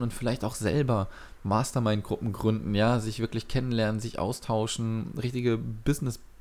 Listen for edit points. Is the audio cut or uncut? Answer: uncut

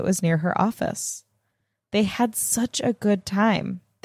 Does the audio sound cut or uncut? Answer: uncut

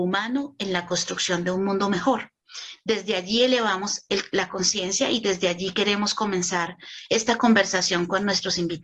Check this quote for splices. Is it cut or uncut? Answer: uncut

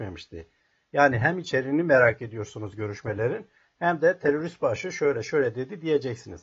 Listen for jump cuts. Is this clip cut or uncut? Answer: uncut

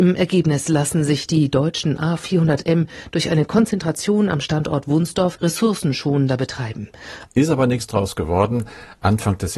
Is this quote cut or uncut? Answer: cut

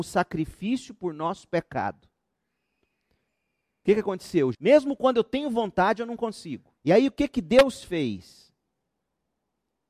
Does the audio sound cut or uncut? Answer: cut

